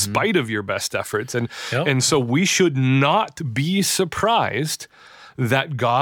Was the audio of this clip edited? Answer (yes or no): no